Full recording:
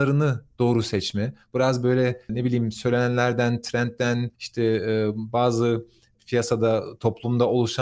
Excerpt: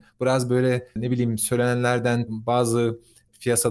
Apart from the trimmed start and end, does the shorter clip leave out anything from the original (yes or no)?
yes